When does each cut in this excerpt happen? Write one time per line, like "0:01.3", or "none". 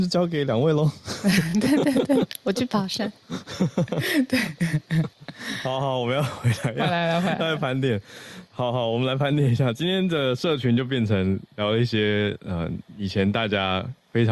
none

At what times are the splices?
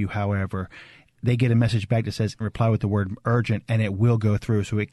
0:02.4

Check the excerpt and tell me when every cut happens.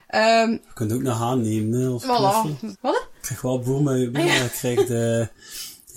0:02.7
0:04.1

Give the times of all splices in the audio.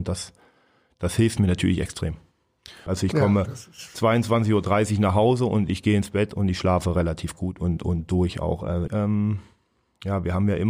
0:02.9
0:08.9

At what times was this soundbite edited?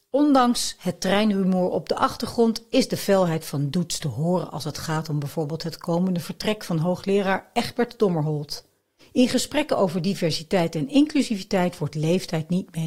0:09.0

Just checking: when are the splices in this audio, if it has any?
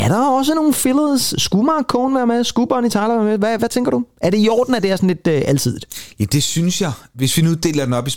0:03.6

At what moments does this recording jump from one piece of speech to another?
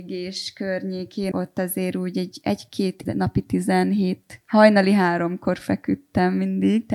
0:01.3
0:03.1
0:04.4

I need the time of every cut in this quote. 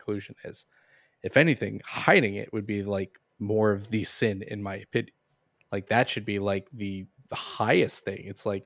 0:05.6
0:07.2

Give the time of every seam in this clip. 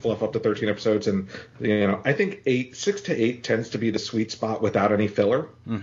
none

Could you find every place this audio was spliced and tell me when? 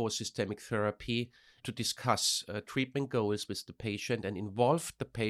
0:01.6

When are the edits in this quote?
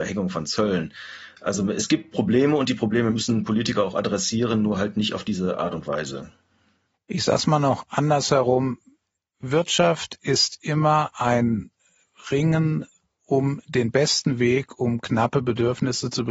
none

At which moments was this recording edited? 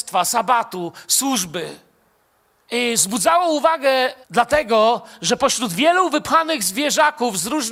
0:02.6
0:04.2

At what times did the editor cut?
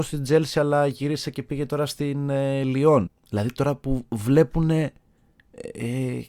0:03.1

